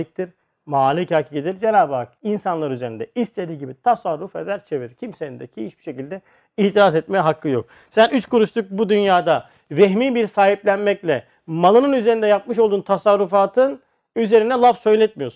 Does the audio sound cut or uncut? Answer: uncut